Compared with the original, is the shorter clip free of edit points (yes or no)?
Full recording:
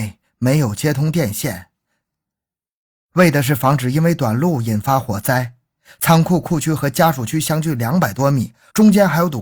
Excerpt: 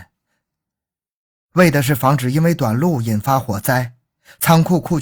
yes